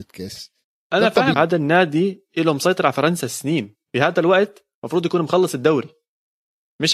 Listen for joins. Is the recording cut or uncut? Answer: cut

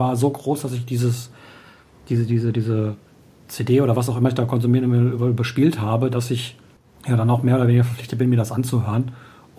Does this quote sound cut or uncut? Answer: uncut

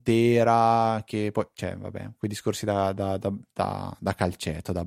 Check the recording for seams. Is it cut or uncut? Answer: uncut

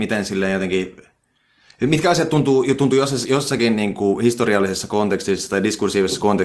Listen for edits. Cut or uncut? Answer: uncut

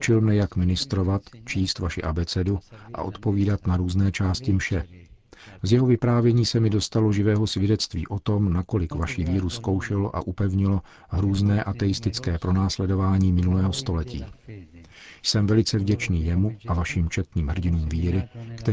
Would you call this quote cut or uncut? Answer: cut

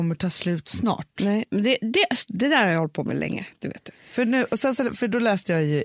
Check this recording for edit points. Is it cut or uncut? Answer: uncut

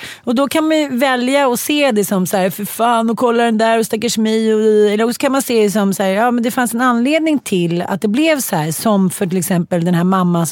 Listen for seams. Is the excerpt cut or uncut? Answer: uncut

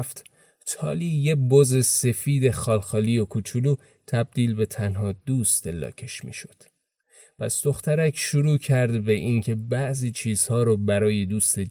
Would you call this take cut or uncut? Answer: uncut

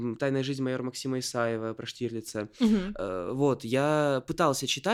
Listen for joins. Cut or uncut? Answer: uncut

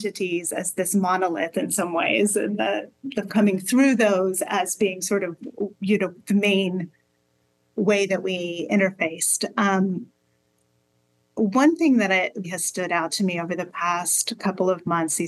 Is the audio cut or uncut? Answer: cut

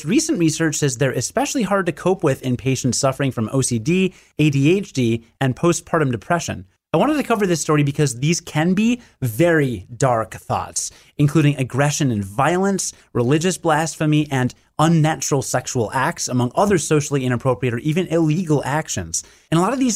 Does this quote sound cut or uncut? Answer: uncut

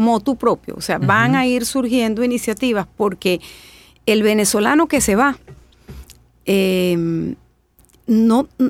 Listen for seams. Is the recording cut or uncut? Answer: uncut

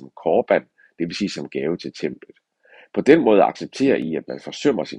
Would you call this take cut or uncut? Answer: uncut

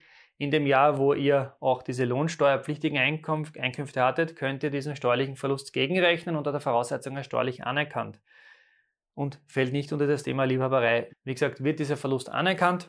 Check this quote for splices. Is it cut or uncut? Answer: cut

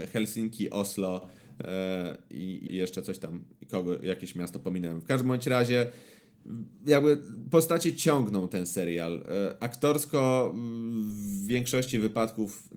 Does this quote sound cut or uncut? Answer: cut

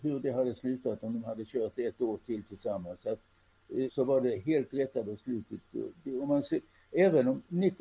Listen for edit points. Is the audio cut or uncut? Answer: cut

